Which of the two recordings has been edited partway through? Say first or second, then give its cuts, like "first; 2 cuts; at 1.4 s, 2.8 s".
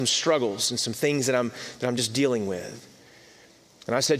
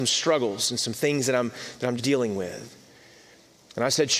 second; 1 cut; at 2.0 s